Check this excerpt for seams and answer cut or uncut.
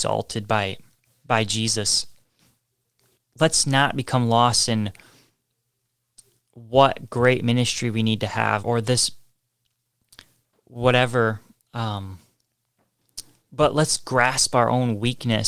cut